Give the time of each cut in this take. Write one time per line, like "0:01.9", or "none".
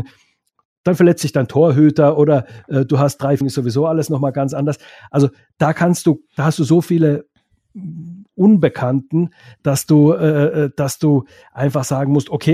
0:03.4